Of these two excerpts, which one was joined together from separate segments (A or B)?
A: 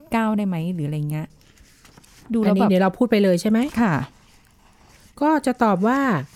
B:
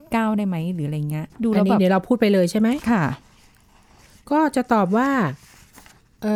B